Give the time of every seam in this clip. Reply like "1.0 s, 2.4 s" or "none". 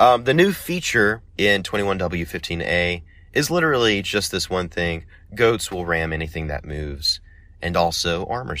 1.3 s

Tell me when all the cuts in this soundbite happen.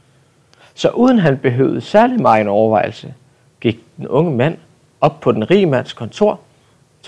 none

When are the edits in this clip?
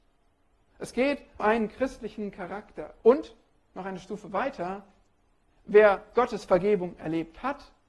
1.4 s, 3.0 s

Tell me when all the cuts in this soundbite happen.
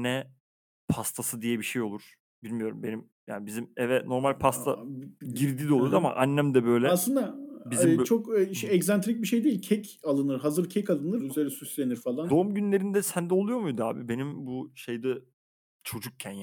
11.2 s, 12.3 s

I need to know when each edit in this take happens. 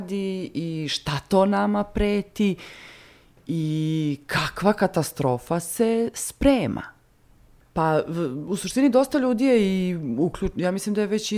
7.6 s

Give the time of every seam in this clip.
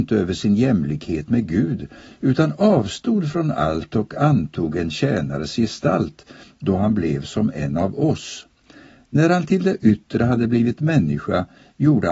none

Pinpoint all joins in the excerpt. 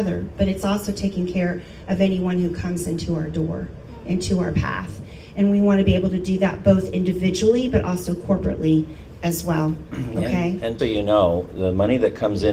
10.8 s

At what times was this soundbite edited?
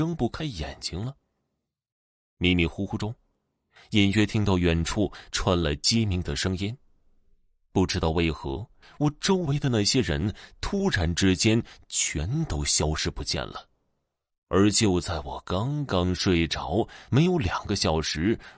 14.3 s

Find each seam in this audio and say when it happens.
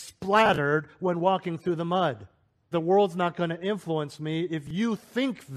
2.7 s

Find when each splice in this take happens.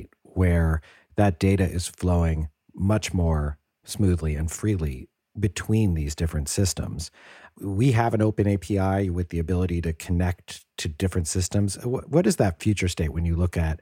none

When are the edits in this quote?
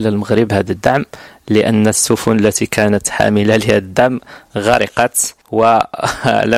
5.4 s

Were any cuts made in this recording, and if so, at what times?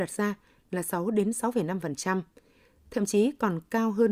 none

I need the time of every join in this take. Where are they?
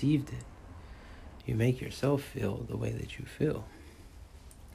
1.4 s

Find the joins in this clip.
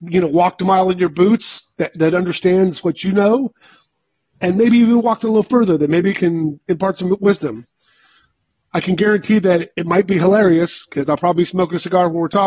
none

